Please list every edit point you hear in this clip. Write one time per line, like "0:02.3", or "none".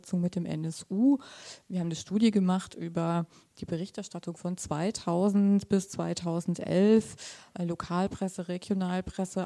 none